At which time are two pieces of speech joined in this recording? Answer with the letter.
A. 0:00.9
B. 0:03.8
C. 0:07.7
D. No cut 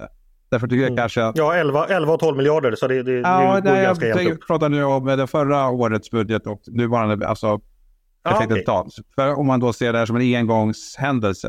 D